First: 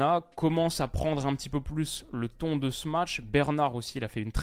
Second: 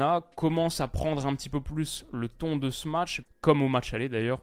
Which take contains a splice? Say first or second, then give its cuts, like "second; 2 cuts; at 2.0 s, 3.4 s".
second; 1 cut; at 3.2 s